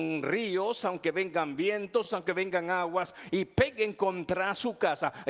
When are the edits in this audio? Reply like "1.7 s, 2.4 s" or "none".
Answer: none